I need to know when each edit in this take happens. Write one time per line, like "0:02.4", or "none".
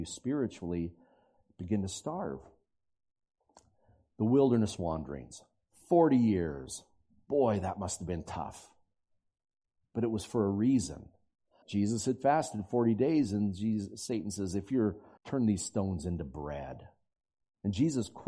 0:11.6
0:15.2